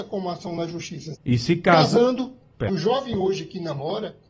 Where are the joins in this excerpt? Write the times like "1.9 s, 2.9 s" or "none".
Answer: 1.1 s, 2.7 s